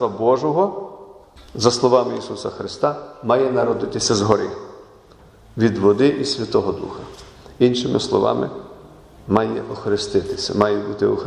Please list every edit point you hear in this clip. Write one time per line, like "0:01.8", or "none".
none